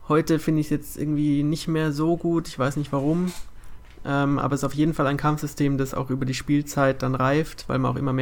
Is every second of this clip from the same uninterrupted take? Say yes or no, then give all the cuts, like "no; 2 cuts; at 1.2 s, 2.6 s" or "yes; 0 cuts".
yes; 0 cuts